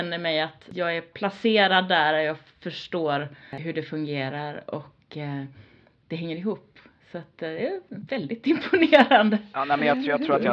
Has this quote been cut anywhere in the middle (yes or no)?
no